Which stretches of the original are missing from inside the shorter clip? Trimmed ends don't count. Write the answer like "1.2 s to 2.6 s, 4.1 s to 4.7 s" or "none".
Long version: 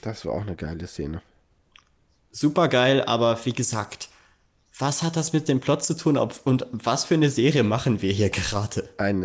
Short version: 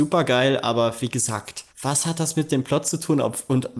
4.1 s to 4.7 s